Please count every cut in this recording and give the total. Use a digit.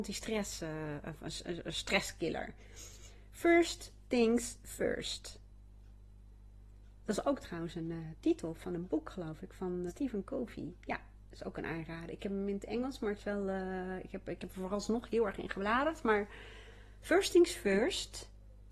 1